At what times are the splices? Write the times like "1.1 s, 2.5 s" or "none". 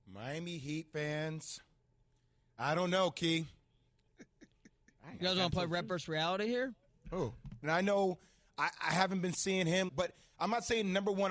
4.1 s, 7.6 s, 9.9 s

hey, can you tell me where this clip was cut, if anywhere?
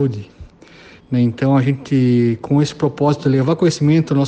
1.0 s

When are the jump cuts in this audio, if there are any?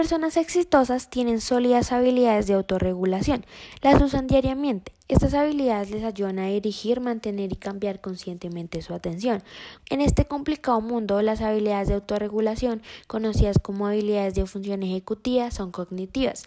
9.8 s

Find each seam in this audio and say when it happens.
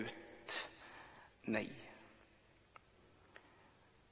1.3 s

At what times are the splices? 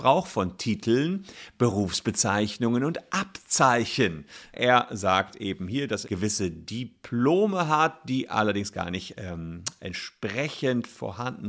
4.5 s, 6.0 s

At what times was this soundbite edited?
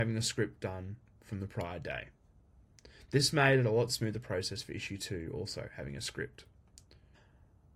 none

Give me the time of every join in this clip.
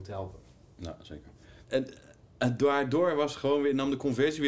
1.6 s

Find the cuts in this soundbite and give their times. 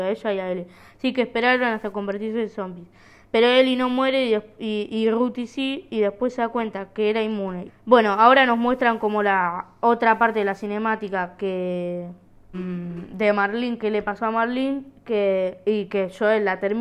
7.7 s, 12.5 s

